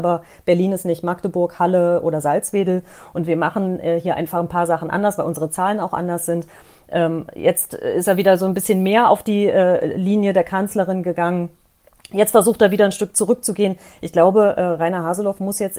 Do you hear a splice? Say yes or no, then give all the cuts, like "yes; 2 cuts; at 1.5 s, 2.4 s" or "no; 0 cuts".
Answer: no; 0 cuts